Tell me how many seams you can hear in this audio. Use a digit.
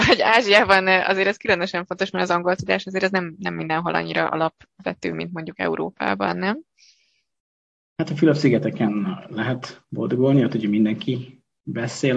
0